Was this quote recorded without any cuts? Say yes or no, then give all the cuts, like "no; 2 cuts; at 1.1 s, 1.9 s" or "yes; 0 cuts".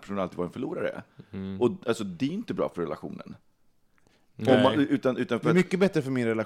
yes; 0 cuts